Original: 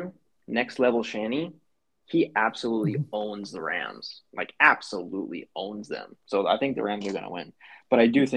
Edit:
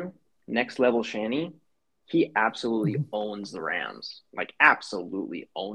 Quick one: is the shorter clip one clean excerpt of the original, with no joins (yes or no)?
yes